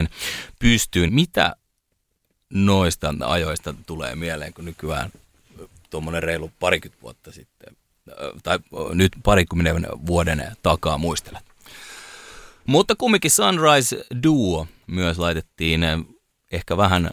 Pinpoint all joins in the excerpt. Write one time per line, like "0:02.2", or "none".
0:01.1
0:12.7